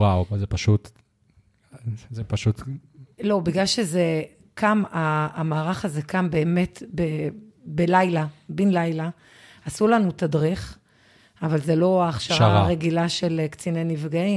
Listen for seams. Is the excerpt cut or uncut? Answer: cut